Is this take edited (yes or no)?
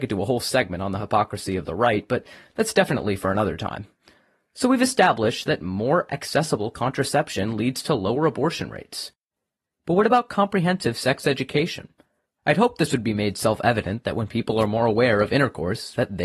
no